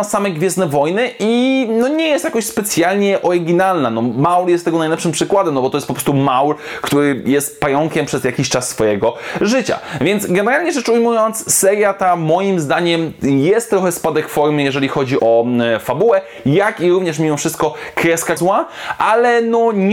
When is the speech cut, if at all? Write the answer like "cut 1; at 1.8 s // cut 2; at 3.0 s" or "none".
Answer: cut 1; at 15.2 s // cut 2; at 18.4 s